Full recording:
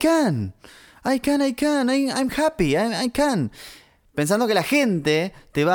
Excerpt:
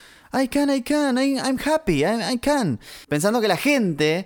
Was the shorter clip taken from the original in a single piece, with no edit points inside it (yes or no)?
no